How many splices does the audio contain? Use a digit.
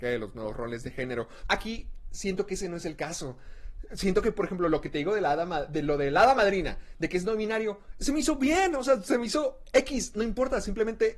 1